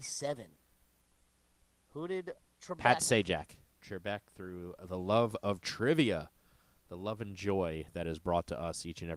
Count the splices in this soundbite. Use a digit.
1